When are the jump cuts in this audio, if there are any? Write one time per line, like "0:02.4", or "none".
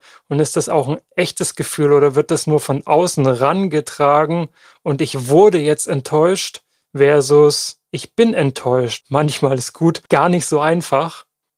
0:09.0
0:10.1